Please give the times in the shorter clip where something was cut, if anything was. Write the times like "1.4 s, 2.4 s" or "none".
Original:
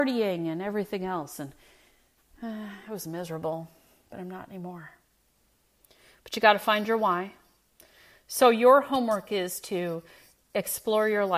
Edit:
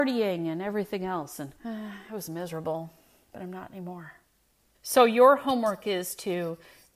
1.6 s, 4.7 s